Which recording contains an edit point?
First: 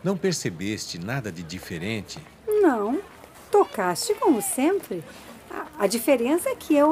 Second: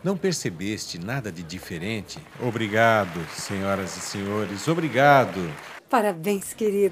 second; 2 cuts; at 2.3 s, 5.8 s

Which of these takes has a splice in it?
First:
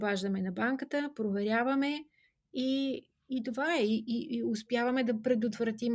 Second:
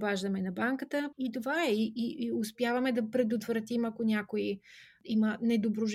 second; 1 cut; at 1.1 s

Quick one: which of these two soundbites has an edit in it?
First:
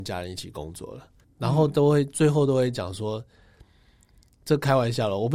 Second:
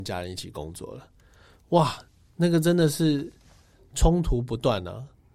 first; 1 cut; at 1.2 s

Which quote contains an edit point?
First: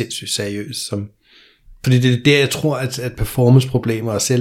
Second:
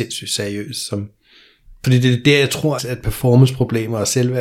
second; 1 cut; at 2.8 s

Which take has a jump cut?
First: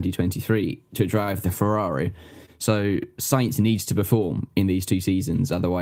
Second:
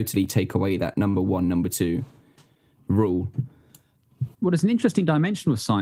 second; 1 cut; at 4.3 s

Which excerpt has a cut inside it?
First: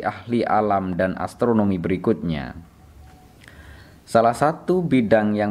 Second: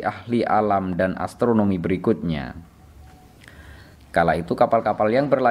second; 1 cut; at 4.0 s

